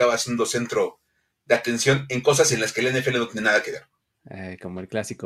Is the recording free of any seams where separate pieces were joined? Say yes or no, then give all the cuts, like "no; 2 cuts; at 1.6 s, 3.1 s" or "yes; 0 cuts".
yes; 0 cuts